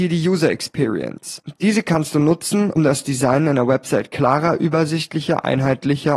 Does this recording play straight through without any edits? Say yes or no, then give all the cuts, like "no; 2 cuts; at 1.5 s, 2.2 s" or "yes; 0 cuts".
no; 1 cut; at 2.8 s